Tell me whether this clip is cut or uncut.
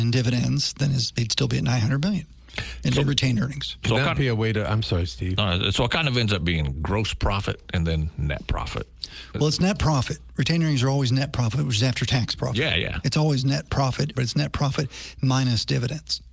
cut